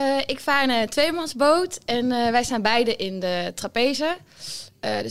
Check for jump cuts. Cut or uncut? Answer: uncut